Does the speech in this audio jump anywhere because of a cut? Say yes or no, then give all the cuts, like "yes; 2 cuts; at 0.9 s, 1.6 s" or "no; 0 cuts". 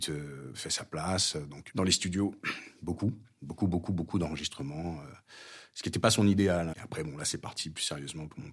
yes; 2 cuts; at 1.7 s, 6.7 s